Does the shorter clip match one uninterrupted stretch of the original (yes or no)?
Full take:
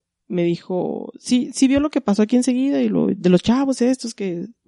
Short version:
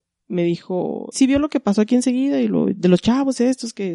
no